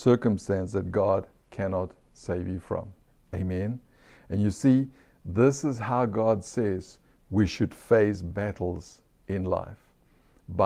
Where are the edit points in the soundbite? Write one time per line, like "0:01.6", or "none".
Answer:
none